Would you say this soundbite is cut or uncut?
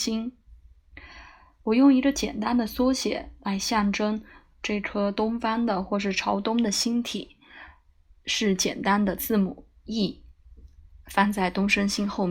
uncut